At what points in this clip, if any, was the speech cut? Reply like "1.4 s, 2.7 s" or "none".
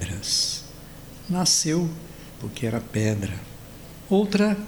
2.4 s